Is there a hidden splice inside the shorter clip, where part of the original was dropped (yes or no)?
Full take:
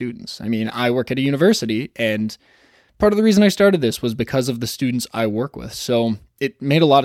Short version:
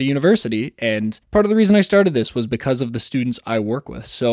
yes